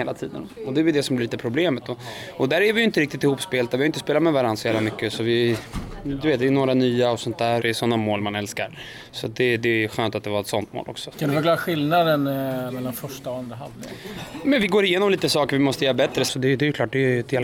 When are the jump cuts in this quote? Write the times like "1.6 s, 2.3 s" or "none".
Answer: 7.6 s, 11.1 s, 16.3 s